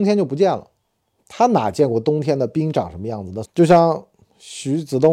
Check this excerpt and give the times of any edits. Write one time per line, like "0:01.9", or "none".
0:03.4